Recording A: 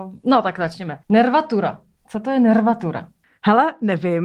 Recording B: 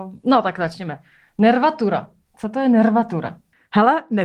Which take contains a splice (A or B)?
A